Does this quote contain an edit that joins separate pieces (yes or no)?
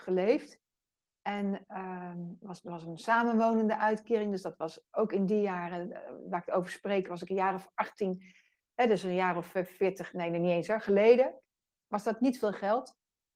no